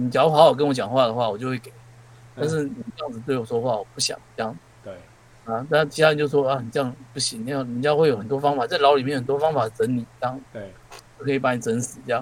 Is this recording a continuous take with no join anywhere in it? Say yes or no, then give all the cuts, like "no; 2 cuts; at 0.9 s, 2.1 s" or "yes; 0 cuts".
yes; 0 cuts